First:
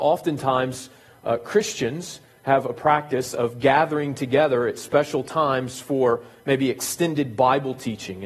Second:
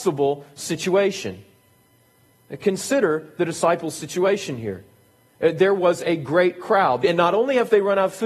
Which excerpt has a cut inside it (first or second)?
second